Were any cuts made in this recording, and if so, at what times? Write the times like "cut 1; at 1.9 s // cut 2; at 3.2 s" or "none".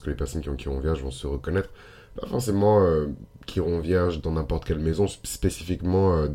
none